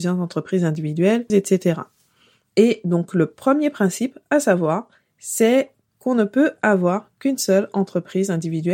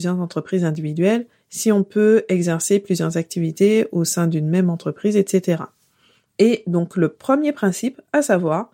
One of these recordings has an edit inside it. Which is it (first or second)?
first